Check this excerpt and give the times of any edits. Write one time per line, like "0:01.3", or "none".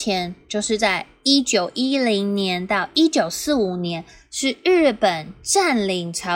none

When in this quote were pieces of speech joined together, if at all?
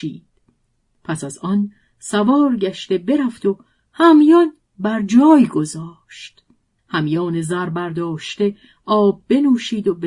0:06.8

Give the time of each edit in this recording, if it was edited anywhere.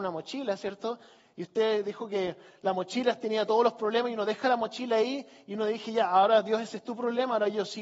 none

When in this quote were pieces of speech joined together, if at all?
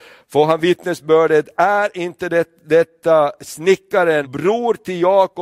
0:04.2

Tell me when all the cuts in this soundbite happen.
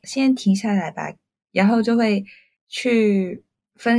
none

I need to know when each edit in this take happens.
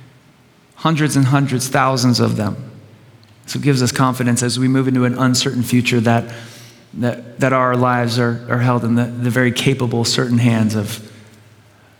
none

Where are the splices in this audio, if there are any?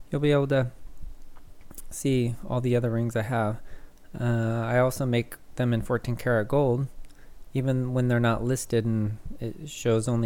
0:04.1

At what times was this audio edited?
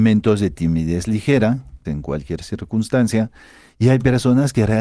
0:01.9

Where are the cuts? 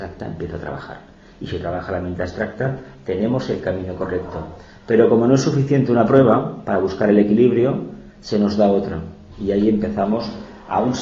none

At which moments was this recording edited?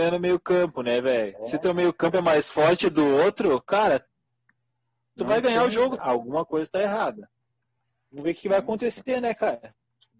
0:06.0

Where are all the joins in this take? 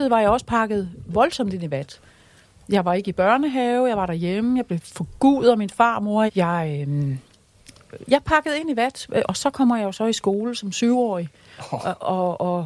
0:06.3
0:09.2

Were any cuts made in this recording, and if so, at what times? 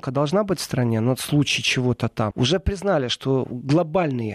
0:02.3

